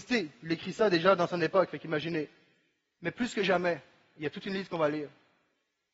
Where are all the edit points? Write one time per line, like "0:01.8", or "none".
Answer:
none

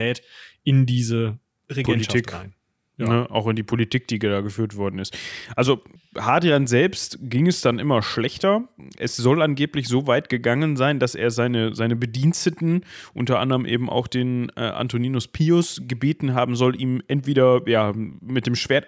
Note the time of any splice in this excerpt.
none

